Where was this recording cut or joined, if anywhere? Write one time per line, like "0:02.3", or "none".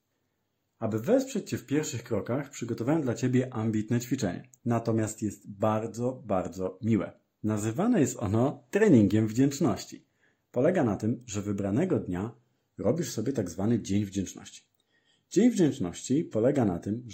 0:04.6